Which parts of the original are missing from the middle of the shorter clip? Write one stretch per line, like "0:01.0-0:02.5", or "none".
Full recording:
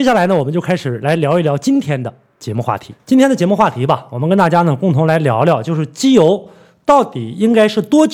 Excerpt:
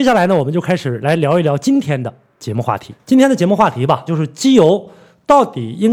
0:04.1-0:05.7